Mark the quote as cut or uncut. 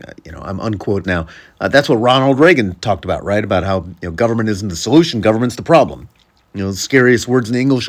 cut